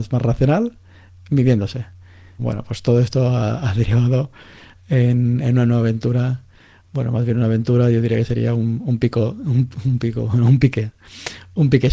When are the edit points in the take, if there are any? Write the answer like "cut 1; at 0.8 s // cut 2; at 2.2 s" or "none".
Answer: cut 1; at 2.4 s